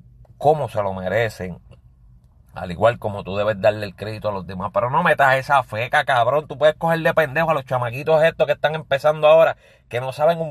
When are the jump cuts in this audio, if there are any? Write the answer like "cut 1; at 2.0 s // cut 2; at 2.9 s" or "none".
none